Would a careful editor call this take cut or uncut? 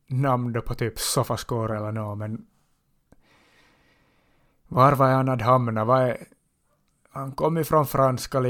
uncut